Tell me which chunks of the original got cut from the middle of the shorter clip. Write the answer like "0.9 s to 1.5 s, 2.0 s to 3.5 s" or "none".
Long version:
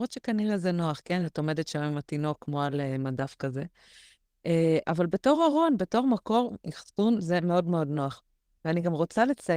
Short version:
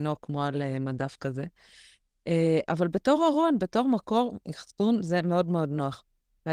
none

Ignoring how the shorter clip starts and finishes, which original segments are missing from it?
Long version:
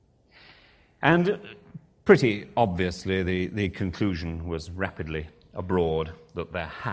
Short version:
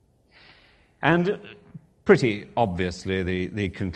none

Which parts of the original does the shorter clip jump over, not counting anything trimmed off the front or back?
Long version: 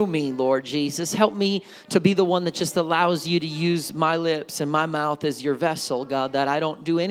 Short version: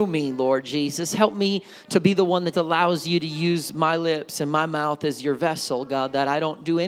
2.5 s to 2.7 s

